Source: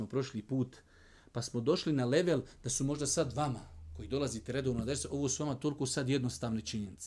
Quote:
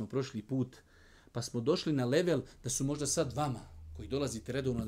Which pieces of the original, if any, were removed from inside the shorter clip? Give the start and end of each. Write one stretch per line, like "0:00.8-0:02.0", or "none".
none